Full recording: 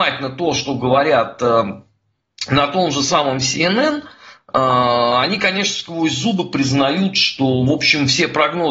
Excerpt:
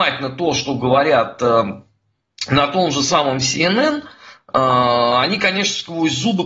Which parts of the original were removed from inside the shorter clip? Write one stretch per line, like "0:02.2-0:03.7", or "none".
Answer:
none